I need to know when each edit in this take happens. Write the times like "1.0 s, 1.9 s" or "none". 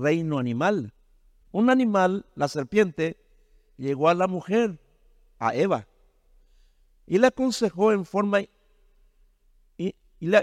1.4 s